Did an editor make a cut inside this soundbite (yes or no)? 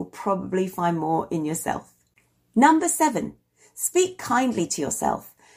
no